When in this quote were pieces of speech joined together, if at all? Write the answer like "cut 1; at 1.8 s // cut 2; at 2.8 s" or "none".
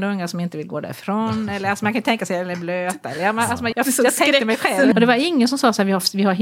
cut 1; at 3.7 s // cut 2; at 4.9 s